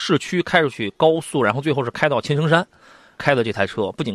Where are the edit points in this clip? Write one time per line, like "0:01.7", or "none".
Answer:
0:03.2